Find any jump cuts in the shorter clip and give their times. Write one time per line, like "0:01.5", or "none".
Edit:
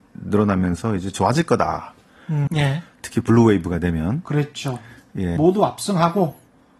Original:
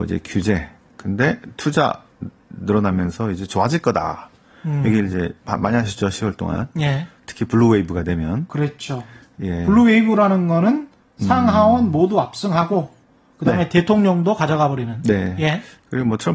0:02.5
0:05.4